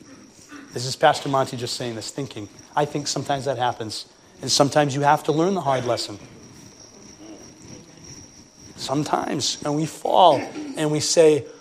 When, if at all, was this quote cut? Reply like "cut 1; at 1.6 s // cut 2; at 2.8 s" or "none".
none